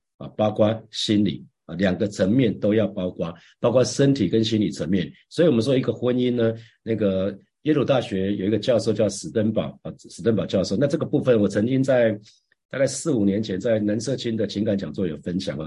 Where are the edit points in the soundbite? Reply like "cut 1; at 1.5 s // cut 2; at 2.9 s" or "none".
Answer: none